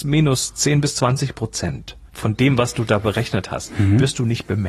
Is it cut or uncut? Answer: cut